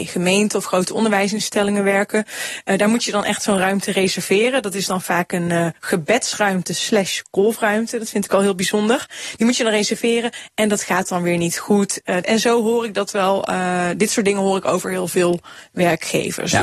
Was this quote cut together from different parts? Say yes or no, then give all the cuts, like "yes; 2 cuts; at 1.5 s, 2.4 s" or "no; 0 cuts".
yes; 1 cut; at 12.2 s